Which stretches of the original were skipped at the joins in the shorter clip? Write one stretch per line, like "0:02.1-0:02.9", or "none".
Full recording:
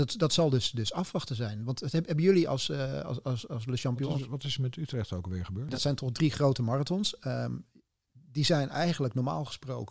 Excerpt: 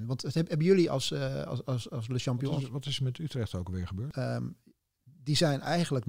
0:05.7-0:07.2